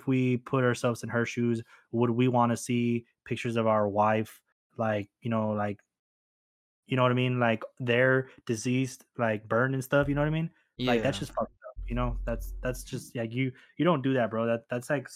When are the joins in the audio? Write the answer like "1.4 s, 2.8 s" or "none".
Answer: none